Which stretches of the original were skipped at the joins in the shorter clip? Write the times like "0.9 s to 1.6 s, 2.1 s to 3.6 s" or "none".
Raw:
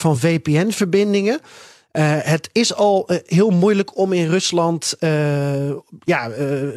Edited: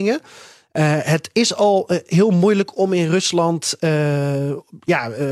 none